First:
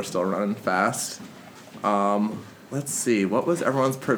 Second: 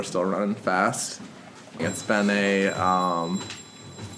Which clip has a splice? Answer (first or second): second